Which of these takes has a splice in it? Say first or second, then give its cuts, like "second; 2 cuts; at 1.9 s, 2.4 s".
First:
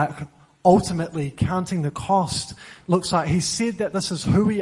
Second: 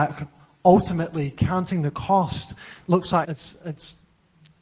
second; 1 cut; at 3.2 s